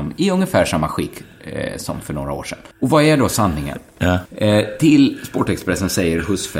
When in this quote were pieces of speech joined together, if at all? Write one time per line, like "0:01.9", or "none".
0:02.7
0:04.3

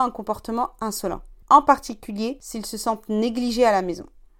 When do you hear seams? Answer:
0:01.4

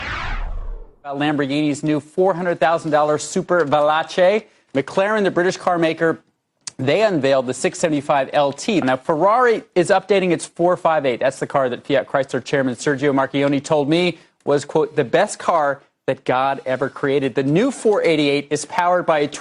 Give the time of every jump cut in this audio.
0:04.7
0:08.8

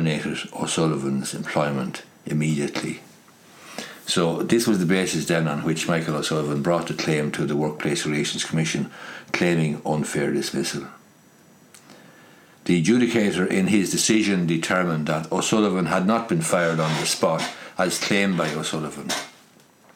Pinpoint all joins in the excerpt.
none

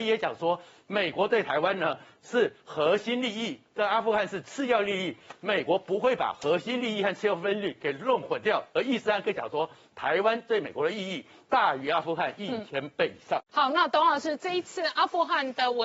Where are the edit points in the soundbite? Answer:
none

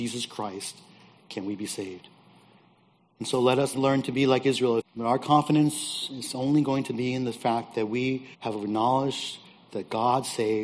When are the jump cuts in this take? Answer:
0:03.7
0:04.8
0:08.3

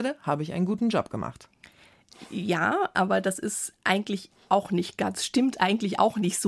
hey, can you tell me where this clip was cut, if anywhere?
none

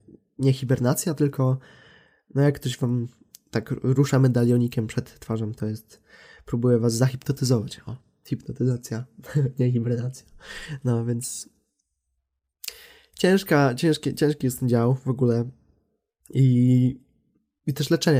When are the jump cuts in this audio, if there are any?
none

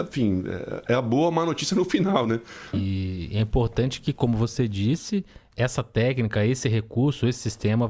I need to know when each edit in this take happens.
0:02.7
0:05.5

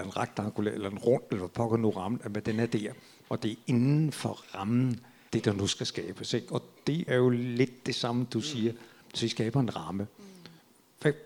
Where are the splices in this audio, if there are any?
0:05.3
0:07.1

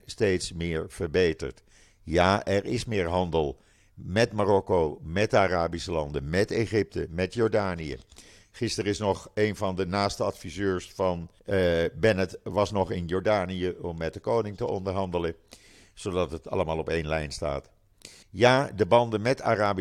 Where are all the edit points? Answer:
0:11.4
0:18.2

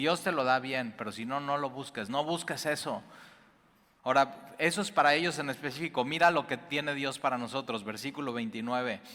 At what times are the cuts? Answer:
0:04.0

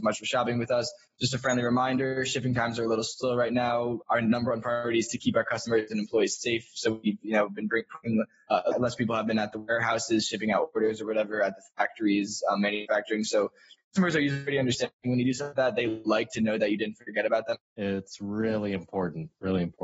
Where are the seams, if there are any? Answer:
0:08.7
0:17.6

